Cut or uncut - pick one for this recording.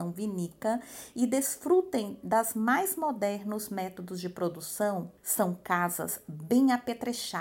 cut